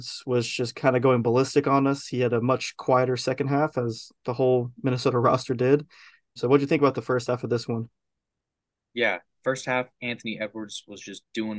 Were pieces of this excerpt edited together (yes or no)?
yes